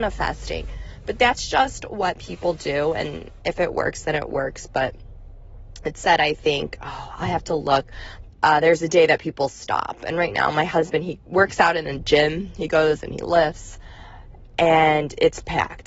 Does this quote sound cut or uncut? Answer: cut